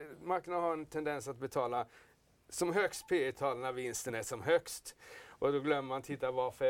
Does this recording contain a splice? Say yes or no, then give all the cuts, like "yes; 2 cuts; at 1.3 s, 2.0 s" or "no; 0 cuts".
no; 0 cuts